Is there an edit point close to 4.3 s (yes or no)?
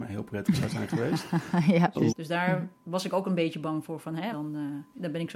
yes